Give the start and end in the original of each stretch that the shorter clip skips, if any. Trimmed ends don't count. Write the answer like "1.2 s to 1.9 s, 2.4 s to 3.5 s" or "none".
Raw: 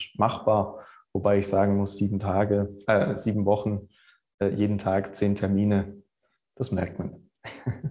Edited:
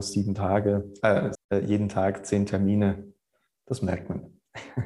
3.2 s to 4.2 s